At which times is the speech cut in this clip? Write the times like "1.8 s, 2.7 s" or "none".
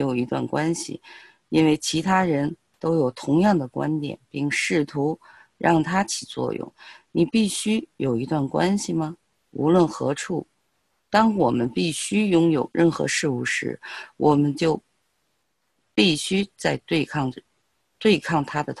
none